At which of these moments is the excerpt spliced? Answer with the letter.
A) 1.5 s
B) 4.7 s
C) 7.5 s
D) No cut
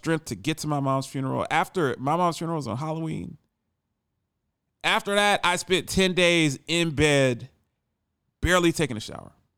D